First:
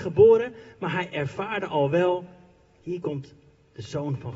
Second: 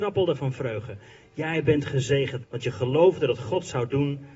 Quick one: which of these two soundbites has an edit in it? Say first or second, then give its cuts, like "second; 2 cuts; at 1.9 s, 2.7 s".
second; 1 cut; at 2.4 s